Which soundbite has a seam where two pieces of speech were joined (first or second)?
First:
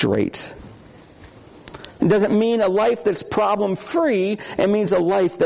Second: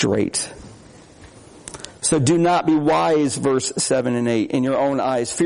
first